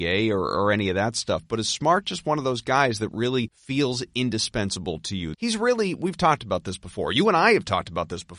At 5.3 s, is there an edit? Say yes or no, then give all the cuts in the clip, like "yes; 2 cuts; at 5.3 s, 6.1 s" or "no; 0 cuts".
yes; 1 cut; at 5.3 s